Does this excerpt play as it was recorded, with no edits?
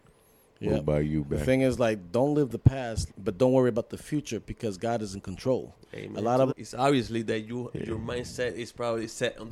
no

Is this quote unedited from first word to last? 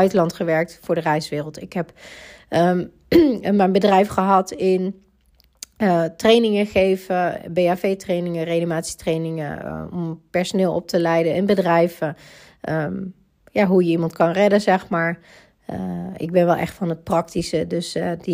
yes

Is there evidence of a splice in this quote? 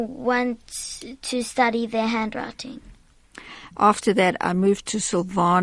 yes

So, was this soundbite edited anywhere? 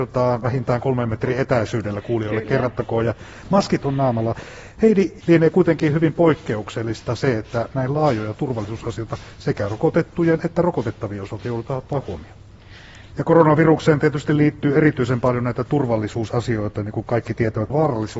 yes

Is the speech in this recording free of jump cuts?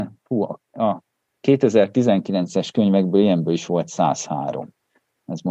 yes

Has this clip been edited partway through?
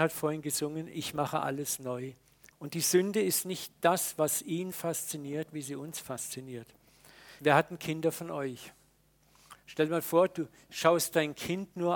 yes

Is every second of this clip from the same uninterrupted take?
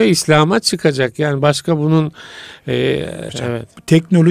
no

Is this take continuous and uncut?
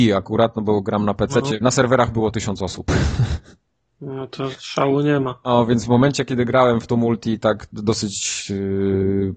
no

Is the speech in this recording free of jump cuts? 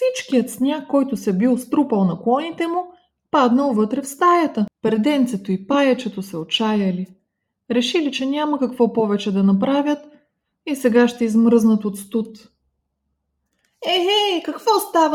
no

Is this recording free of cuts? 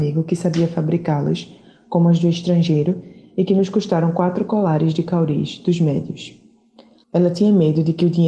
no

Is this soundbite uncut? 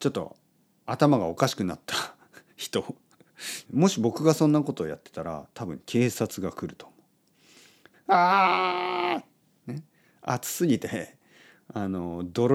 no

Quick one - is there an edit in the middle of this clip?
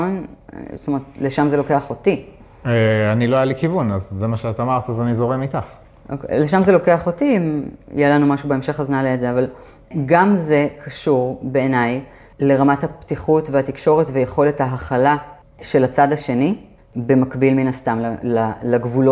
no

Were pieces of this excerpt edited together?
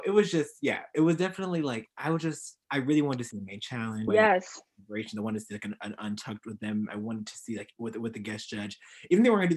yes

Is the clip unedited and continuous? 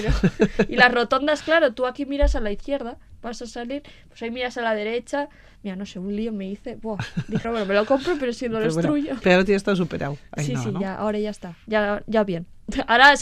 no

